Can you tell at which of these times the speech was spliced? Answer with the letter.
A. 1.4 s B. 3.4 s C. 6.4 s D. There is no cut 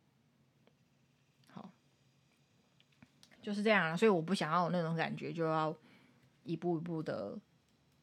B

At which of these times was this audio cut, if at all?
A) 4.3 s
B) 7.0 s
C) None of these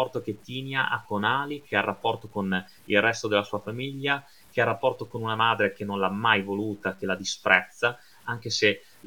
C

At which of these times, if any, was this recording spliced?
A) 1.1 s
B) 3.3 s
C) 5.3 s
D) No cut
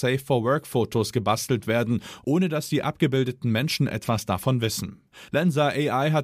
C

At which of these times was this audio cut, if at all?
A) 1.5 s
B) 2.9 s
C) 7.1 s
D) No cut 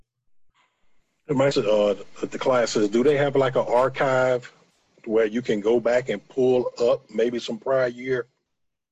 A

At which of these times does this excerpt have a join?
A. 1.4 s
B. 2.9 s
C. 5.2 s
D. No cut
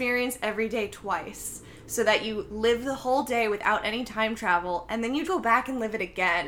C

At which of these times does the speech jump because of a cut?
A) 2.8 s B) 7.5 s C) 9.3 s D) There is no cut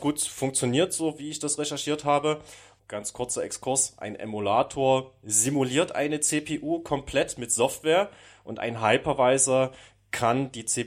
A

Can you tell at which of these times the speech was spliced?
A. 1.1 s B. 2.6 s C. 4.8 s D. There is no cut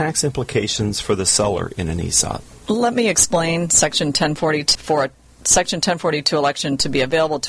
C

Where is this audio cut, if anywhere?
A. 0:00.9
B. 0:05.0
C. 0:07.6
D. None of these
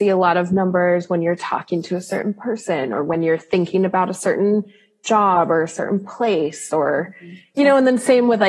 C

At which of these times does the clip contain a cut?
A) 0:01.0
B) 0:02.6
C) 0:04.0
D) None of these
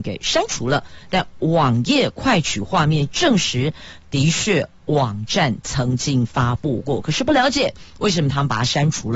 D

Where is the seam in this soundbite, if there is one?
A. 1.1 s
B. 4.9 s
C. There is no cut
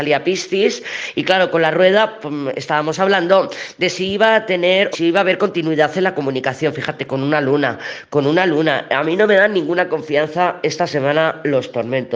B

